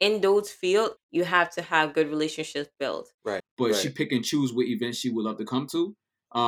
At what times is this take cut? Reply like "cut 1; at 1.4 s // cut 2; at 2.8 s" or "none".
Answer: cut 1; at 1.0 s // cut 2; at 3.4 s

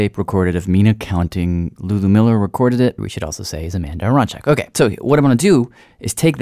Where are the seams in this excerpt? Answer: cut 1; at 3.0 s

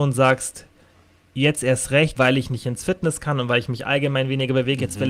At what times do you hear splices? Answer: cut 1; at 2.2 s

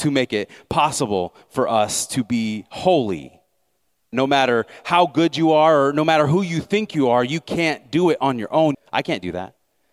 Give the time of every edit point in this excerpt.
cut 1; at 4.1 s // cut 2; at 8.7 s

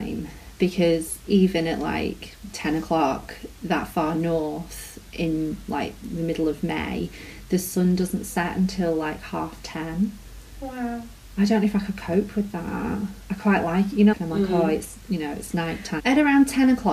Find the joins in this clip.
cut 1; at 14.1 s // cut 2; at 16.0 s

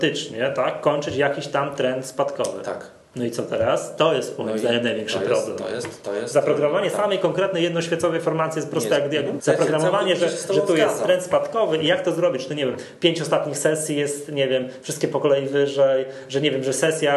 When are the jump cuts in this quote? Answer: cut 1; at 9.4 s

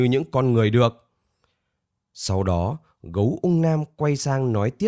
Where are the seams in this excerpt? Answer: none

